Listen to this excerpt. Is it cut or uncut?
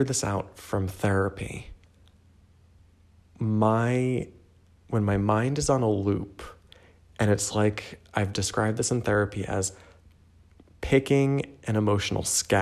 uncut